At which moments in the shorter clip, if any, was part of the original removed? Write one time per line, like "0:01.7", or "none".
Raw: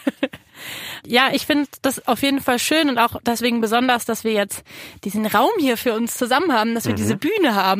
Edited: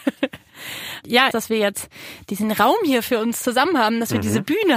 0:01.3